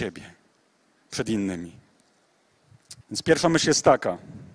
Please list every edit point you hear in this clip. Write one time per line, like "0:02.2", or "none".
0:03.0